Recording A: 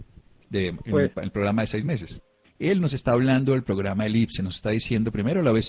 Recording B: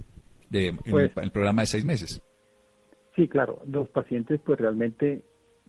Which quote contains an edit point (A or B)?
A